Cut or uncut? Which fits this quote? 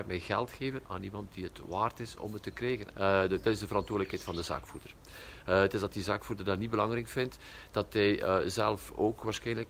cut